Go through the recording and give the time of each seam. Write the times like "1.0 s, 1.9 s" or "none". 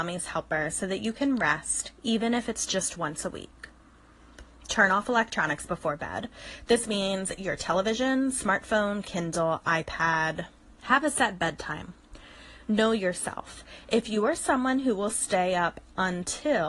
9.0 s, 10.8 s